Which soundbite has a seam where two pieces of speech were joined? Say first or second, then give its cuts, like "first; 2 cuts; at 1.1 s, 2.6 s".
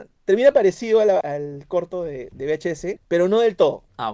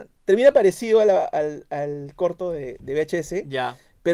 first; 2 cuts; at 1.2 s, 3.0 s